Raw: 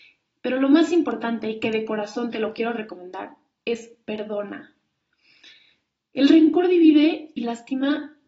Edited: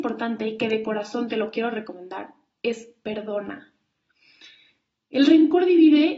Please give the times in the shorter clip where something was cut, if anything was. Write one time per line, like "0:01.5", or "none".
none

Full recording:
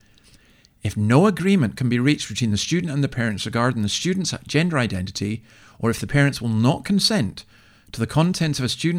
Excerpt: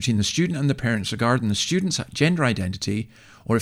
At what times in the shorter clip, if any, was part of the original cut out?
none

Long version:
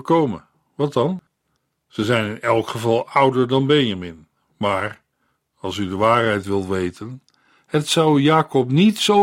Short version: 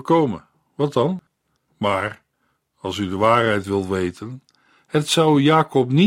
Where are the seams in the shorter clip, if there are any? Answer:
0:01.7

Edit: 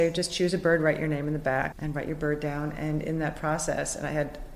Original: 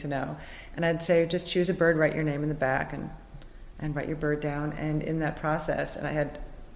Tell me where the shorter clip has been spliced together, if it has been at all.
0:01.7

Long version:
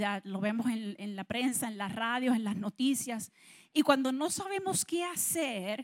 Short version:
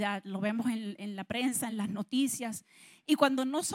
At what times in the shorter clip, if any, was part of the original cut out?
0:01.7

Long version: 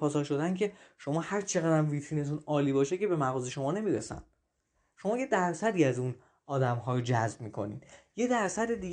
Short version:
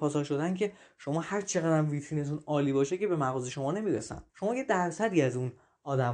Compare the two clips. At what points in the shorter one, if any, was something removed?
0:04.3

